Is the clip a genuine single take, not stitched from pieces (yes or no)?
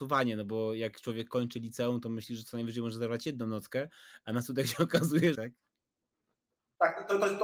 no